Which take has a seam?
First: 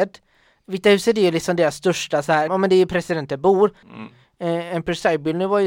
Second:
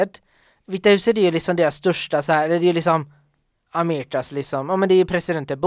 first; 2 cuts; at 2.5 s, 3.8 s

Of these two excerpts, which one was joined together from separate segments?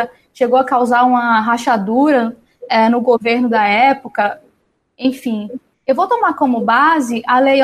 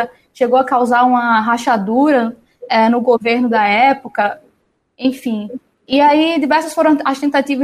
first; 1 cut; at 5.7 s

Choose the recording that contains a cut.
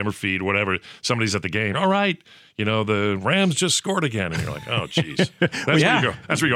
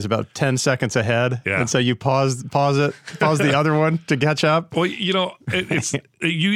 first; 1 cut; at 1.7 s

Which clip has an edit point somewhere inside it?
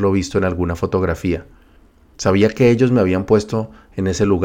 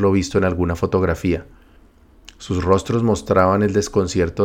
first; 1 cut; at 2.1 s

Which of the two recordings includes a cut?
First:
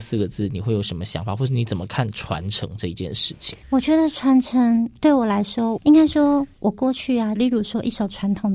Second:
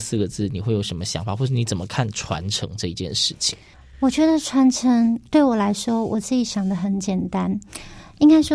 first; 3 cuts; at 3.6 s, 5.8 s, 7.3 s

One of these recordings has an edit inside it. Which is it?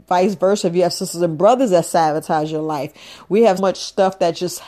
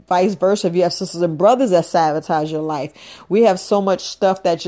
first; 1 cut; at 3.6 s

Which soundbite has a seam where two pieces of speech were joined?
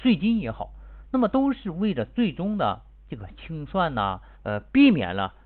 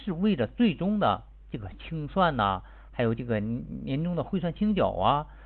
first; 1 cut; at 4.3 s

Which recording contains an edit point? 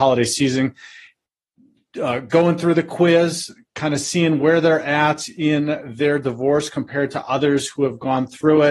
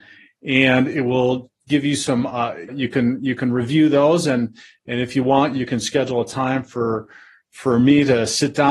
second; 1 cut; at 2.7 s

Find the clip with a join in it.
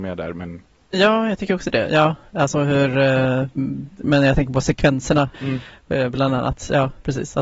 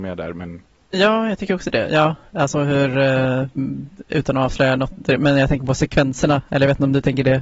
first; 2 cuts; at 4.0 s, 5.3 s

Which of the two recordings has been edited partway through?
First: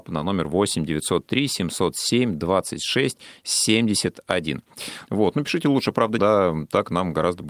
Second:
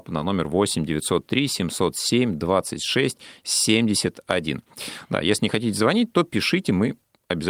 first; 2 cuts; at 5.1 s, 6.2 s

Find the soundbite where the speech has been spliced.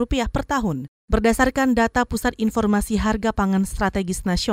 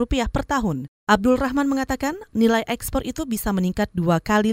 first; 1 cut; at 1.0 s

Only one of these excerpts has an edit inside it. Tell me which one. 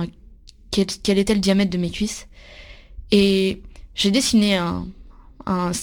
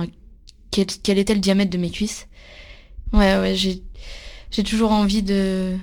second; 1 cut; at 3.1 s

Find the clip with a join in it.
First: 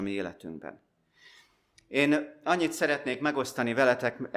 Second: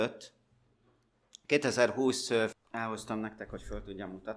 second; 1 cut; at 2.5 s

